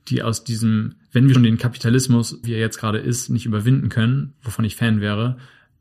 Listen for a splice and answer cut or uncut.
cut